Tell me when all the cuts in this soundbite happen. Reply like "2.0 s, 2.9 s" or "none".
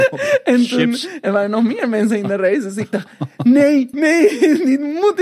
3.9 s